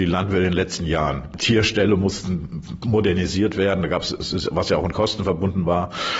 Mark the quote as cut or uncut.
uncut